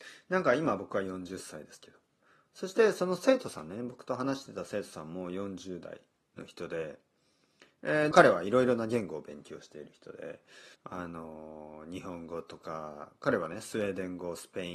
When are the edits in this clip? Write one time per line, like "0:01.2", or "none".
0:08.1
0:10.7